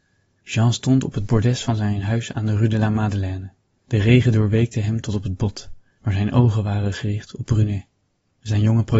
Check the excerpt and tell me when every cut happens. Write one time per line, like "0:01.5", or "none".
none